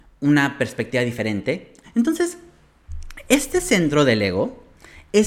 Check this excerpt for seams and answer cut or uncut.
cut